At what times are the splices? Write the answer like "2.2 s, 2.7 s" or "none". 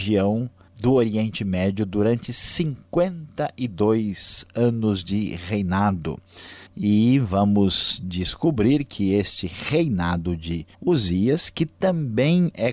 6.7 s, 10.7 s